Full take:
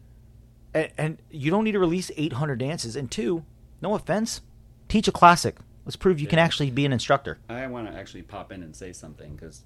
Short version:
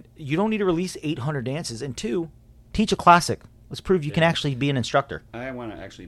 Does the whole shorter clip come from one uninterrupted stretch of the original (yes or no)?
no